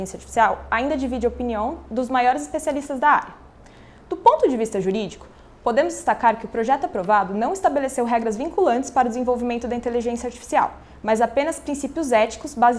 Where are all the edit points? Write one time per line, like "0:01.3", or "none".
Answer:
none